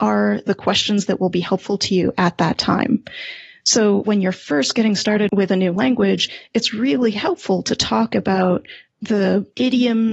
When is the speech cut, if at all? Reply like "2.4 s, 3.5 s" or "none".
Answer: 4.0 s